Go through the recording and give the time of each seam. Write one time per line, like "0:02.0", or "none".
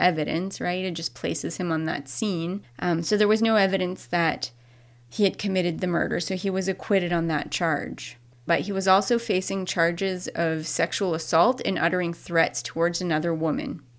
0:08.5